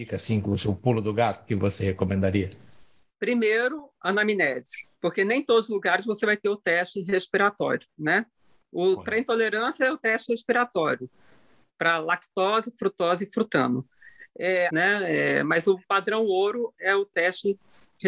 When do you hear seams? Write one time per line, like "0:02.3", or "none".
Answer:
0:14.7